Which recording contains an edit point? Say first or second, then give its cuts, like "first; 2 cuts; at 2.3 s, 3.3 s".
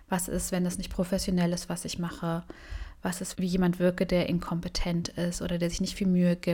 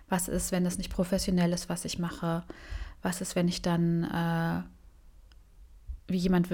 first; 1 cut; at 3.3 s